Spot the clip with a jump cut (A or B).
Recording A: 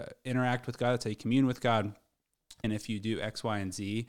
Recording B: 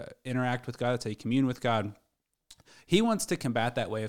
A